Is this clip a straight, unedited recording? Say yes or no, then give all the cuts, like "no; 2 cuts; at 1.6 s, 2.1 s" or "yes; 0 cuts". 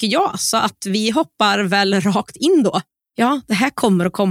no; 1 cut; at 3.1 s